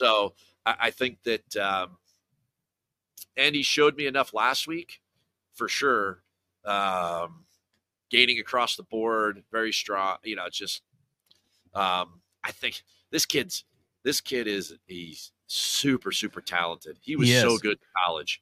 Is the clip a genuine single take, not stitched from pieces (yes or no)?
yes